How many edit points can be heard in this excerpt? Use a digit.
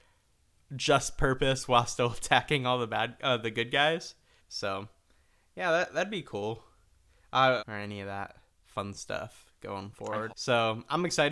3